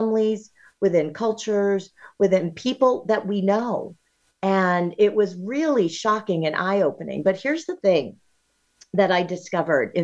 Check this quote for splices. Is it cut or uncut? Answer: uncut